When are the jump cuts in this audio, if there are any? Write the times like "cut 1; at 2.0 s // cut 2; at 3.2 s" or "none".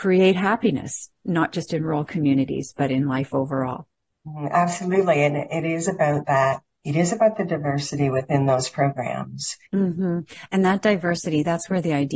cut 1; at 9.6 s